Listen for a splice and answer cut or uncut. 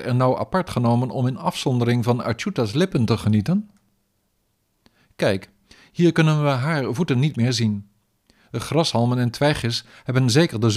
uncut